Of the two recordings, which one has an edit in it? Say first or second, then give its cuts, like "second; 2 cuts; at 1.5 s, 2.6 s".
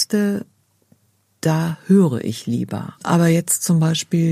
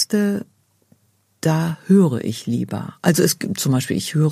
first; 1 cut; at 3.0 s